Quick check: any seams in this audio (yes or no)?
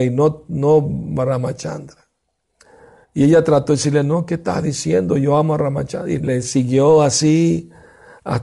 yes